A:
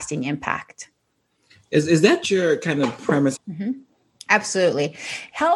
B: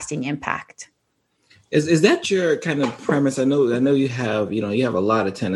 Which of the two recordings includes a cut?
A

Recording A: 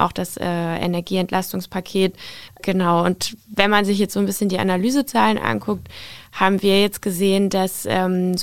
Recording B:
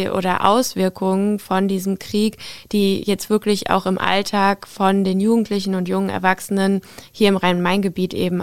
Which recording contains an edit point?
A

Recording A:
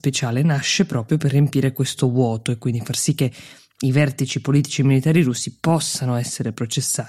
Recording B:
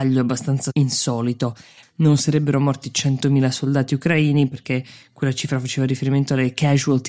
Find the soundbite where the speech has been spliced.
B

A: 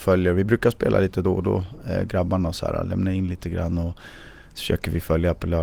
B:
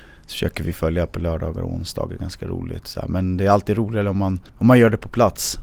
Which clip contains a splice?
B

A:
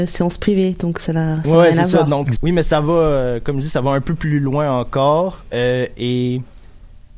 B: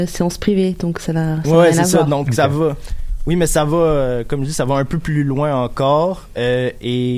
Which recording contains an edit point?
A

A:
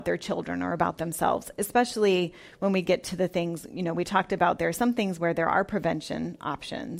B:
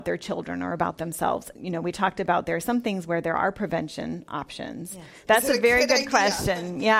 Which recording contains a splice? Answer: B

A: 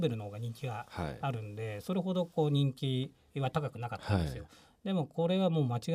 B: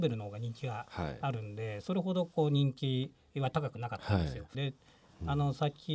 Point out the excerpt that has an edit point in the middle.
B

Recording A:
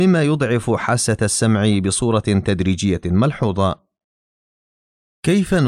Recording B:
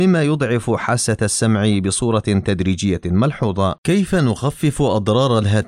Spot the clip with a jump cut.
B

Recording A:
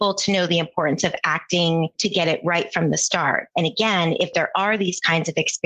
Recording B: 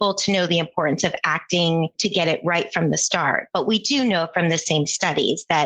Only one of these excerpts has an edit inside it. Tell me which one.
A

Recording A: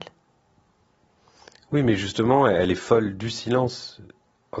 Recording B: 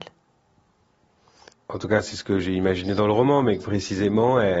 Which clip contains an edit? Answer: B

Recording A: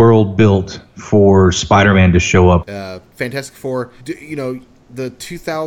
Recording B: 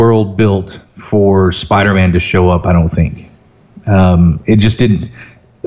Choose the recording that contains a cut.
A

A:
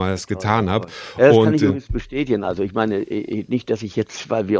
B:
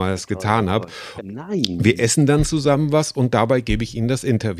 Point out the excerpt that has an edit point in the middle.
B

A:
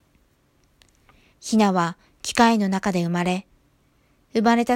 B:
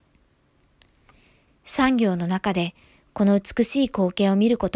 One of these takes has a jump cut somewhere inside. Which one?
A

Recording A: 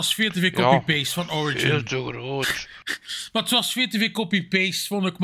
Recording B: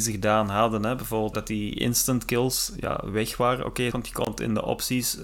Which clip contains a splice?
B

